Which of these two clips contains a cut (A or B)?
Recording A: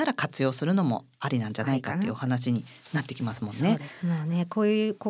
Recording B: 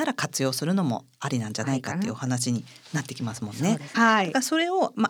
B